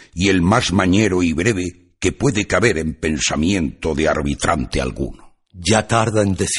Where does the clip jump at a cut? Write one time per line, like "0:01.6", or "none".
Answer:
none

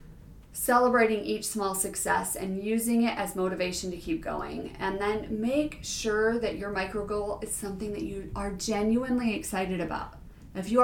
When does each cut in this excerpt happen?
none

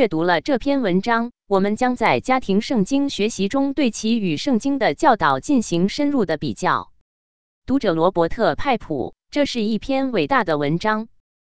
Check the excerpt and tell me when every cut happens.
none

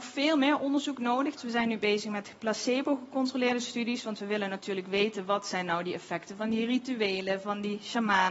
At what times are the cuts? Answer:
0:01.4

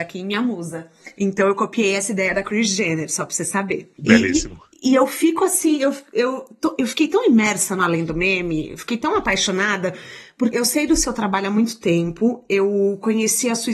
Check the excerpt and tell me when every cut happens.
0:10.5

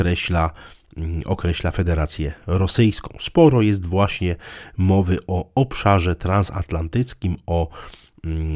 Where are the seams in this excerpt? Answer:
none

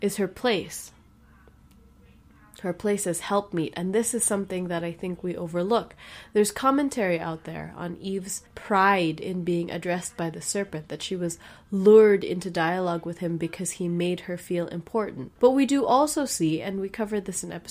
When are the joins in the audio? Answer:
0:08.5
0:15.4

